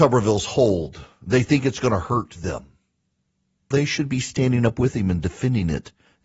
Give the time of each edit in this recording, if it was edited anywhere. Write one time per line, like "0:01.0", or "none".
0:03.7